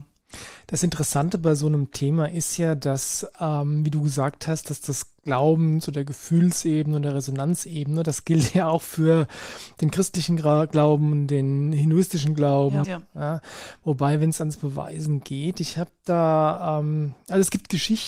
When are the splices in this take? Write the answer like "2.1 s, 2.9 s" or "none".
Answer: 12.8 s